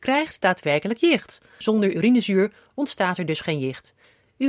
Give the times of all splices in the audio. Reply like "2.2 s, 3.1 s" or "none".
1.6 s